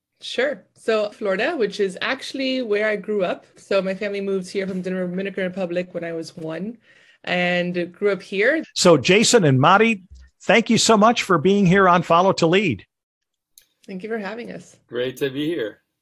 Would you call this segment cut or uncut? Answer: cut